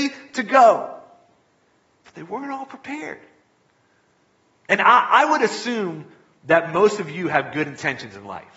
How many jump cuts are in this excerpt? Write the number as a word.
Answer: zero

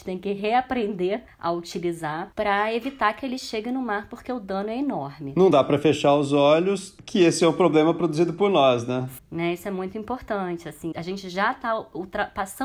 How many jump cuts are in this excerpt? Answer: one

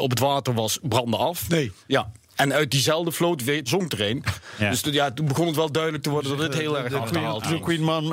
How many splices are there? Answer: one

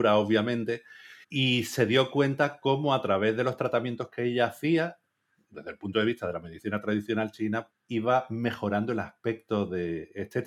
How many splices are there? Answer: two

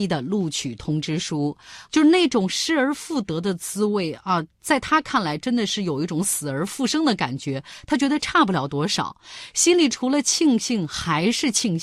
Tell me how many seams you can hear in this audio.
one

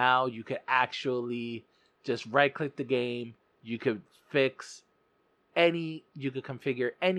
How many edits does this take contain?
one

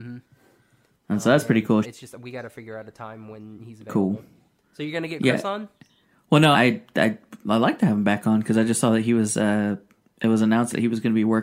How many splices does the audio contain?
two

